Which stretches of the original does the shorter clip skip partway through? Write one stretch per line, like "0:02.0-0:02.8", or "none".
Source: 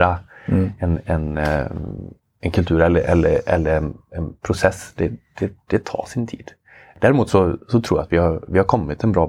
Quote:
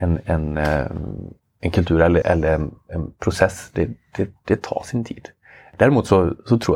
0:03.0-0:03.4